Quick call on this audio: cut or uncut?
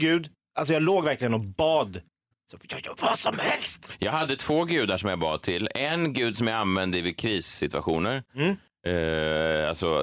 uncut